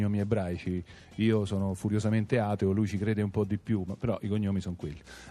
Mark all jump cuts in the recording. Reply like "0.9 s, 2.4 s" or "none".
none